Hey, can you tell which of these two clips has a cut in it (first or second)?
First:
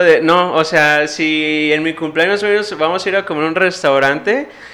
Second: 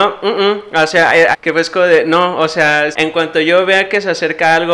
second